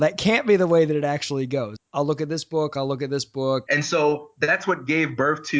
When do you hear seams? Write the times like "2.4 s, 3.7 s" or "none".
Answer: 1.8 s, 3.7 s